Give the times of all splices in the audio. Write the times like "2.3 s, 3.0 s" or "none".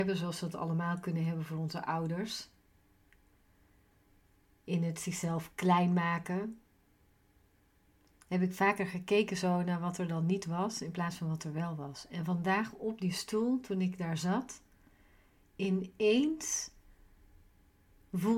none